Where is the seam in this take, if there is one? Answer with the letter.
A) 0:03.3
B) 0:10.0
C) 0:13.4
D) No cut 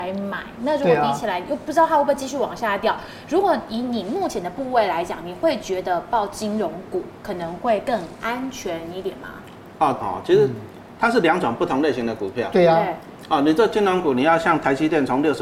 B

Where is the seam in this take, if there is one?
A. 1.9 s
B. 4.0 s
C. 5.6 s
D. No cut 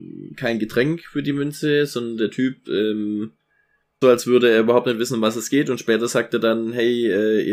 B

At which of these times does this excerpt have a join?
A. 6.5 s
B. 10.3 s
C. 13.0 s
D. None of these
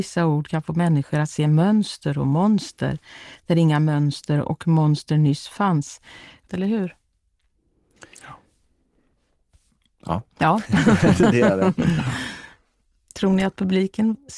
A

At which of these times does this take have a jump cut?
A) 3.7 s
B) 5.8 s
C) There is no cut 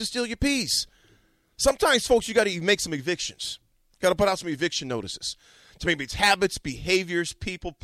C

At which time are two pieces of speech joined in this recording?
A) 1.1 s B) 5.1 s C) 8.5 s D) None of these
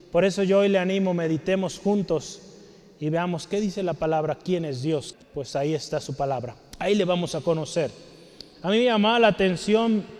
B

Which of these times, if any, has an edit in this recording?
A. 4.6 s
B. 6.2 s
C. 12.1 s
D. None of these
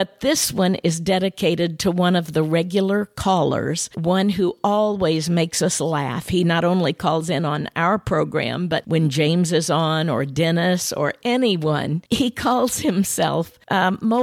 D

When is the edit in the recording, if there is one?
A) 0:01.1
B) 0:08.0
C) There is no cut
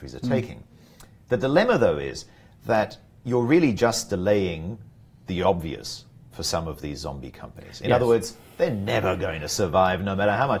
C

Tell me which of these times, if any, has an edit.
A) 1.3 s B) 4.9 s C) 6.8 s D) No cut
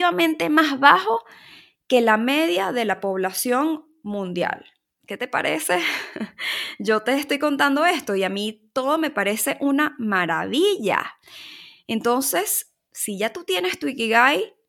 B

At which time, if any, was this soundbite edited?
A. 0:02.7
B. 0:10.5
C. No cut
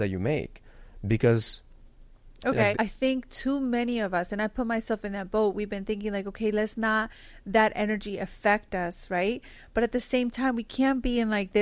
A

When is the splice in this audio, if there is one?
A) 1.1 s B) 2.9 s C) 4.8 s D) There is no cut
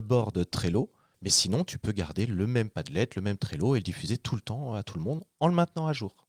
A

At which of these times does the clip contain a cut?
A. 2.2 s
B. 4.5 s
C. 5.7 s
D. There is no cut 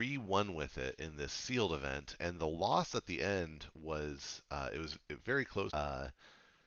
C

